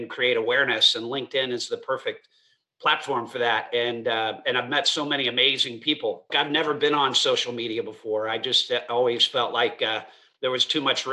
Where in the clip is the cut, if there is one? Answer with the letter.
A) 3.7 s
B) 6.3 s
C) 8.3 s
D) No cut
B